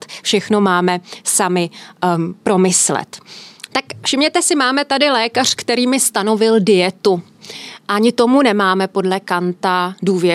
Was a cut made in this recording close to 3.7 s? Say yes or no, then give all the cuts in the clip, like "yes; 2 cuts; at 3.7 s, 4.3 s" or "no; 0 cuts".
yes; 1 cut; at 3.7 s